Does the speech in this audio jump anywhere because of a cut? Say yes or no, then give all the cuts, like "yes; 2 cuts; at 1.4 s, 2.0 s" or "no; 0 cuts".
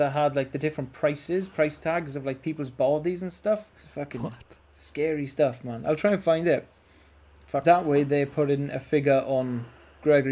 yes; 2 cuts; at 3.8 s, 7.6 s